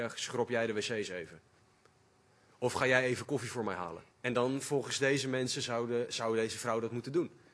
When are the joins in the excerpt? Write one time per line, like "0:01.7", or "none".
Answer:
0:04.1